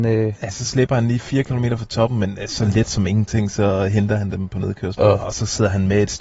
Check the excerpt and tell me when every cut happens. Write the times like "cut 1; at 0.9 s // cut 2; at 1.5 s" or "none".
cut 1; at 5.0 s